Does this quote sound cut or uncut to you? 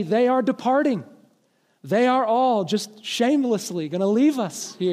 uncut